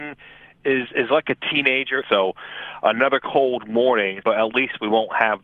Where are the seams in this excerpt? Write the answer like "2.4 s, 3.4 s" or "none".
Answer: 2.0 s, 4.2 s